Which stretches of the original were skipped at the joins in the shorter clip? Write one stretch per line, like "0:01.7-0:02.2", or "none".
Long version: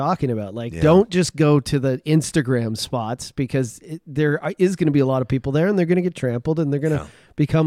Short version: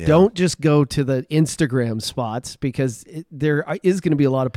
none